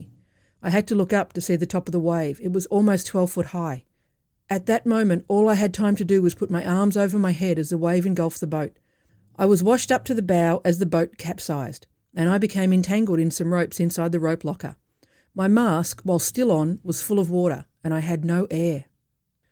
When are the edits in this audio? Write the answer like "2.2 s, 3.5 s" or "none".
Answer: none

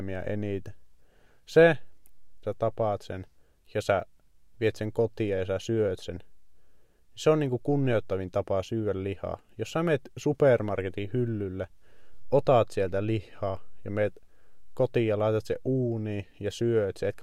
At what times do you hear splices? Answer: 2.4 s

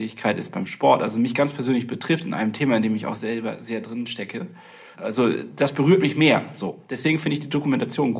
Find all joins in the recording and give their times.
4.9 s

